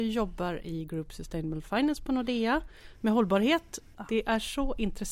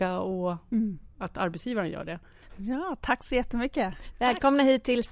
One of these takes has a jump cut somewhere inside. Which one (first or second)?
second